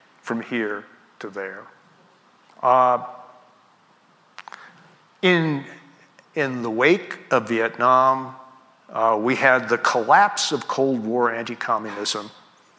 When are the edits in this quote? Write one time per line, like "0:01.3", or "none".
0:02.5